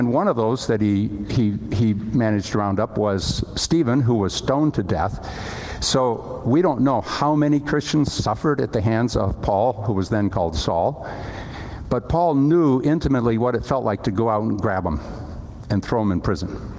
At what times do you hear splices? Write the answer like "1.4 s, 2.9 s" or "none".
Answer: none